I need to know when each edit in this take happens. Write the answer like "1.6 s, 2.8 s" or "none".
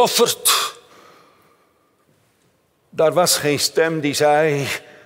none